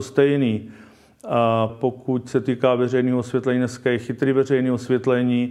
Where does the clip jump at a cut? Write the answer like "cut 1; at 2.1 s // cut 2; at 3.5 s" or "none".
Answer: cut 1; at 1.7 s